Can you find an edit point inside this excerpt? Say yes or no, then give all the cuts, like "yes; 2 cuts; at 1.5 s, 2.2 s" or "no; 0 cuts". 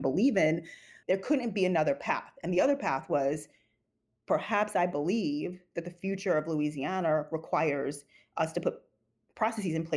yes; 1 cut; at 1.0 s